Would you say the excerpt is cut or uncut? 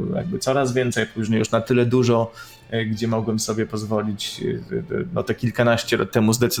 uncut